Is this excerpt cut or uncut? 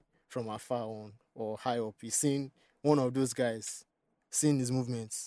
uncut